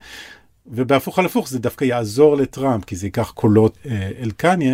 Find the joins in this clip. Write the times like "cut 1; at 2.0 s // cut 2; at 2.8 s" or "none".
cut 1; at 3.8 s